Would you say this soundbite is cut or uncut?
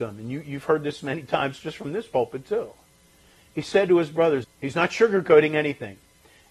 cut